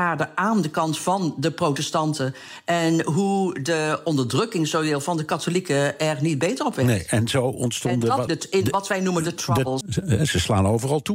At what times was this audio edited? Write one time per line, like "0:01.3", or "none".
0:08.3
0:09.8

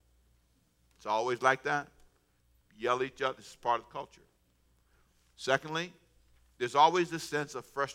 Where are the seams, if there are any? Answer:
0:02.6

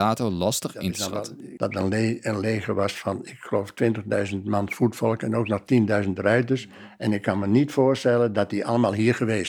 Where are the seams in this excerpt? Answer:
0:01.6

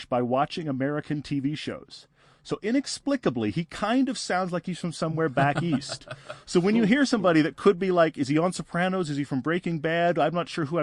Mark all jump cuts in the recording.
none

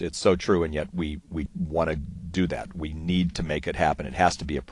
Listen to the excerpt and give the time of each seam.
0:01.5

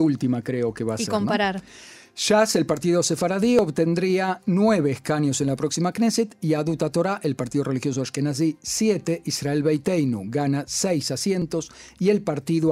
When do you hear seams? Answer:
none

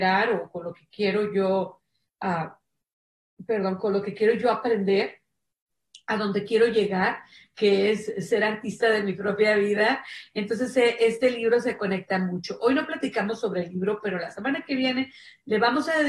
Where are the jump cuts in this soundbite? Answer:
none

